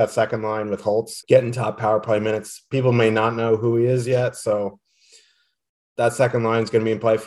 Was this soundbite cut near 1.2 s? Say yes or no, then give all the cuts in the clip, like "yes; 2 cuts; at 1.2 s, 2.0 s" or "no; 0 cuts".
yes; 1 cut; at 1.2 s